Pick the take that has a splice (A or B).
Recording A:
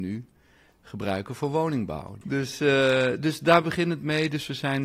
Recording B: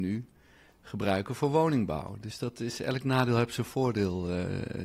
A